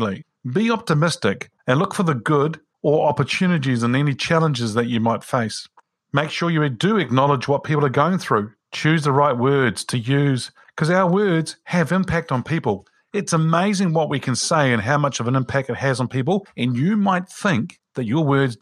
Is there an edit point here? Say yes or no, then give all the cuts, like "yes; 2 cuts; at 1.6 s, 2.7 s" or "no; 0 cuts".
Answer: yes; 1 cut; at 8.6 s